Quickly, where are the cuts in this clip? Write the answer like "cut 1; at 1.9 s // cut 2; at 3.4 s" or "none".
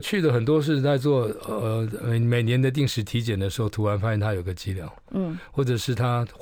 none